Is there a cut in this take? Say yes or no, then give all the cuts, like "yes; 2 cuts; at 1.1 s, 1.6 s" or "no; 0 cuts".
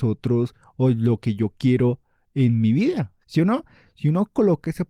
yes; 1 cut; at 3.2 s